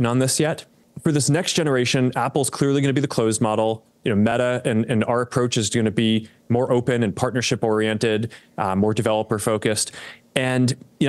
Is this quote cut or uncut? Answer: uncut